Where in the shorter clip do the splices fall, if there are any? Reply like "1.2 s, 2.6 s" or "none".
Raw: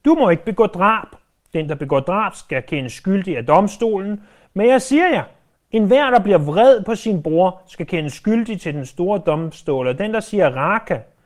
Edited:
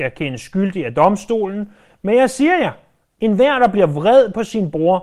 none